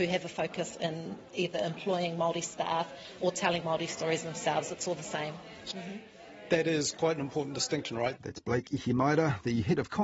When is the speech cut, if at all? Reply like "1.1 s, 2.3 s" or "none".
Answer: 5.7 s, 8.2 s